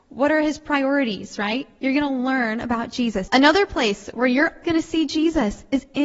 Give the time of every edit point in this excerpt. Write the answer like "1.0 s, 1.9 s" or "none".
3.3 s, 4.6 s

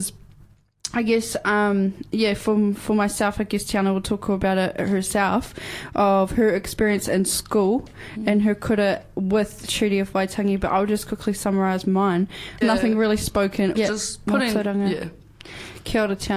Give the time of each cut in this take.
12.6 s, 13.7 s

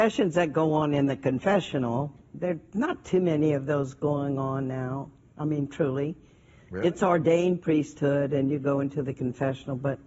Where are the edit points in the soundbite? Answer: none

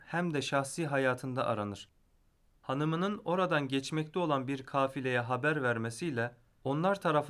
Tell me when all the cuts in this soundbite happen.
2.5 s

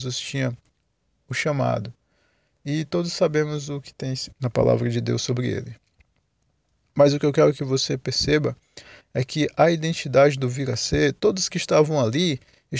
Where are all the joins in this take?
4.3 s

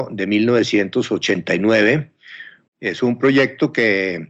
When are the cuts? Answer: 2.7 s

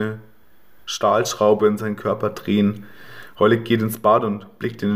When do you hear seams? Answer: none

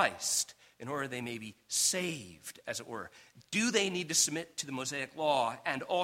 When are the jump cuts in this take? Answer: none

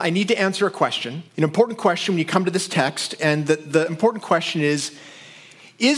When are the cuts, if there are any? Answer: 1.3 s

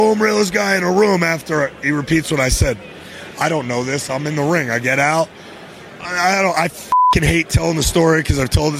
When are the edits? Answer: 6.0 s

